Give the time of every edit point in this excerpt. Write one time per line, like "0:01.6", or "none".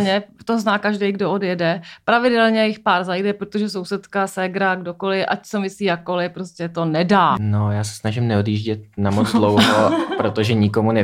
none